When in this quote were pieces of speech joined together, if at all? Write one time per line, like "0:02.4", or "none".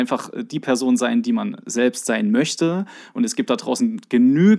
none